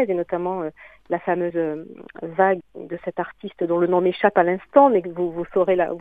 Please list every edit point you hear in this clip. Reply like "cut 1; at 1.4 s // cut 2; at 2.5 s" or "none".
cut 1; at 2.6 s